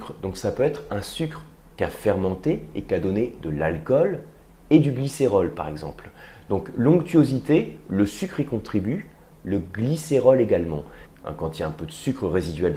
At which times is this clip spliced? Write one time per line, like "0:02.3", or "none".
0:09.3
0:11.1